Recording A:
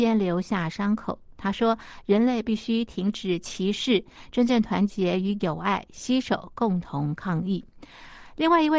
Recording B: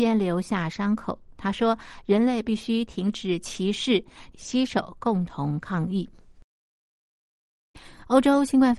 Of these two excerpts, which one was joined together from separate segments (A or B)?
B